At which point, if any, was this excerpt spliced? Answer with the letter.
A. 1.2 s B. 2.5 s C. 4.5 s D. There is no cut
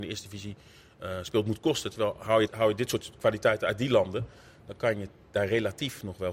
B